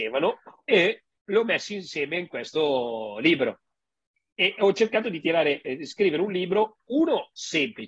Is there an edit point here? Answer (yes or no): no